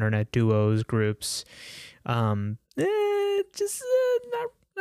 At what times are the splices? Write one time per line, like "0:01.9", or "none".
0:02.6